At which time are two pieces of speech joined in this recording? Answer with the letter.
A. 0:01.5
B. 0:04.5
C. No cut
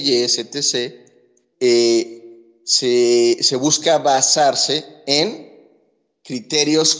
A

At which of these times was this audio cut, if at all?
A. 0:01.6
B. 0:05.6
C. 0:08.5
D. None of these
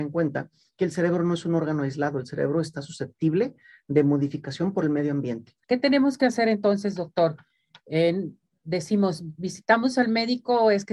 B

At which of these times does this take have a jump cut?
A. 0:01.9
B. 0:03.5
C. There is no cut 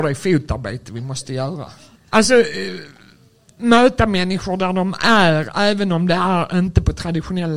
A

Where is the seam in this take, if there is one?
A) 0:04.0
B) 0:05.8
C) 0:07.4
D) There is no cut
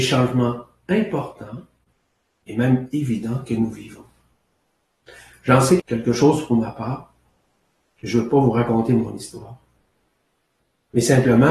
B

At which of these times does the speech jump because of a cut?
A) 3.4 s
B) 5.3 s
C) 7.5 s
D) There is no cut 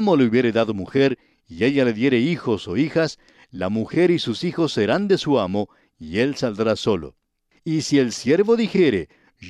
C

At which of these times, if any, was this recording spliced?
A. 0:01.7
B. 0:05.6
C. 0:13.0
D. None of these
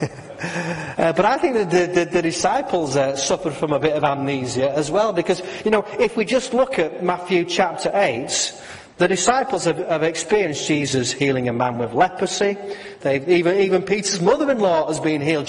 C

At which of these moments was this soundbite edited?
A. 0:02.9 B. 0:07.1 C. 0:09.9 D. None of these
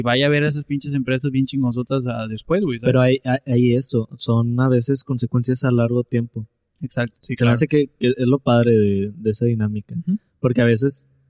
B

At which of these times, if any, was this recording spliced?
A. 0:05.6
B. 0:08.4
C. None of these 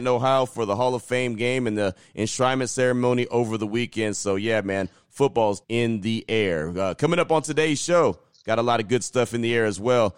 A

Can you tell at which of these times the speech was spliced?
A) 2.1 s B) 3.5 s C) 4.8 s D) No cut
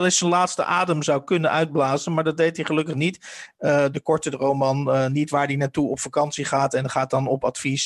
B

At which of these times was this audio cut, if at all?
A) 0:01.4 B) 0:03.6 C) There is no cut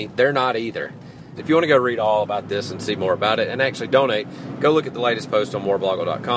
A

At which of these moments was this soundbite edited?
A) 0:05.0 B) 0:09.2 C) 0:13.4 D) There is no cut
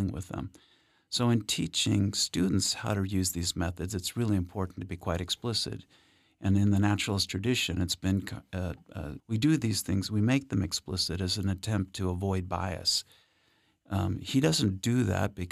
B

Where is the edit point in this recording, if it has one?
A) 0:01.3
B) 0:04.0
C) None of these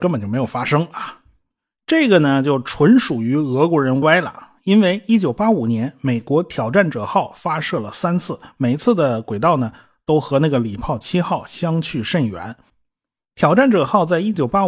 B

